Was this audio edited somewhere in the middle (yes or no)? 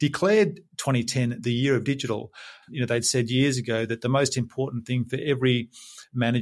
yes